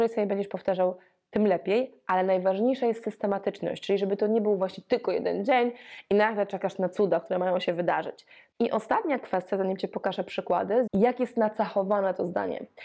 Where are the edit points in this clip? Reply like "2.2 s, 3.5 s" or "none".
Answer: 8.5 s, 10.9 s